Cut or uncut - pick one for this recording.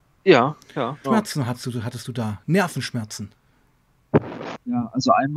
cut